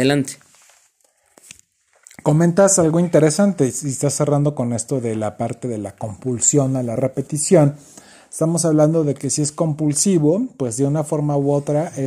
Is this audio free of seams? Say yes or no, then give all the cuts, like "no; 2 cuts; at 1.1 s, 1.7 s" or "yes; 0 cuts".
no; 1 cut; at 7.0 s